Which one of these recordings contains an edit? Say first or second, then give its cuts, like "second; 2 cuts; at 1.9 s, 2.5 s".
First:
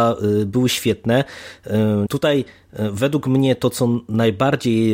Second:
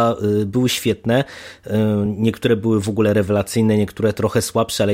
first; 1 cut; at 2.1 s